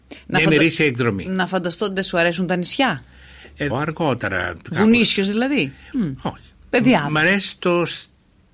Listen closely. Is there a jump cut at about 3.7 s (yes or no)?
yes